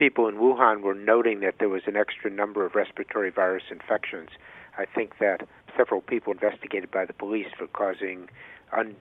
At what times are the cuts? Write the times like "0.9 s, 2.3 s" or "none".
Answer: 6.3 s

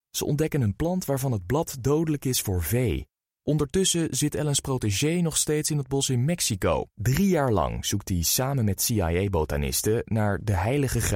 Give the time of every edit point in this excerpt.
3.3 s, 6.9 s

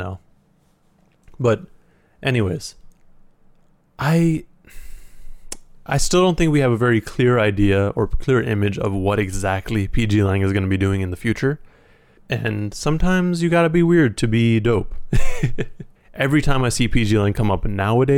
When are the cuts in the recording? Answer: 12.2 s, 16.0 s

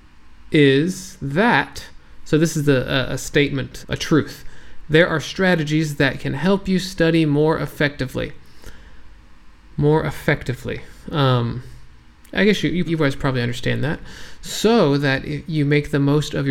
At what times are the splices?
3.8 s, 12.9 s

